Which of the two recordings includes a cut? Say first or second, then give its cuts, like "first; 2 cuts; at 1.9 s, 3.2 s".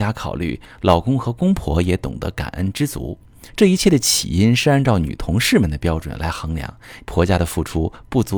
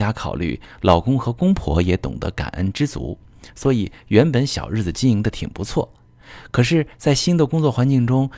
first; 2 cuts; at 3.5 s, 7.0 s